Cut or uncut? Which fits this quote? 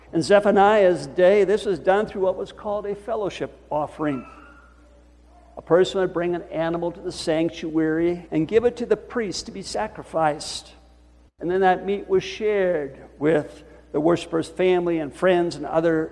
cut